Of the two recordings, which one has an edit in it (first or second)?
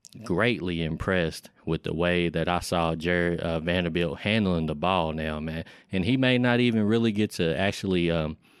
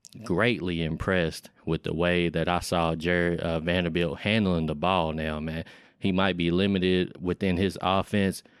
second